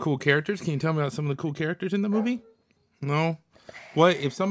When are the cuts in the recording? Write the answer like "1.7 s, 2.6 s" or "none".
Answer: none